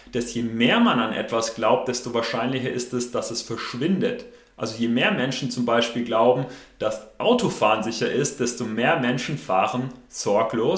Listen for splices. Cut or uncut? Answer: uncut